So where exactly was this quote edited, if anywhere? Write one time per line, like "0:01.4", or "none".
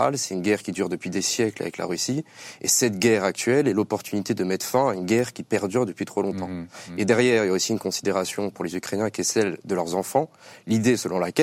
none